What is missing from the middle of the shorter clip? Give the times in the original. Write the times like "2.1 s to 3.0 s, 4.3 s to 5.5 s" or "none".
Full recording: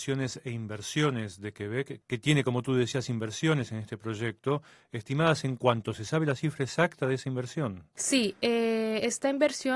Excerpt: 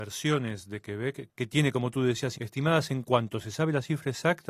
3.1 s to 4.9 s